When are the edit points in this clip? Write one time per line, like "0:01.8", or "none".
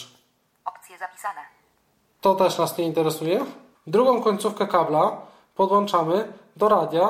0:02.2
0:03.7